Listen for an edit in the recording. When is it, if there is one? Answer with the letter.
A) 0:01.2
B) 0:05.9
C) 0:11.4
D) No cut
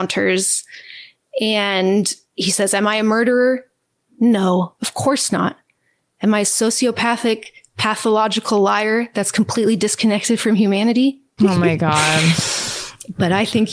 C